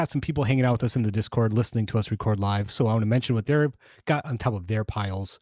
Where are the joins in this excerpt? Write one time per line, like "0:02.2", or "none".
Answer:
none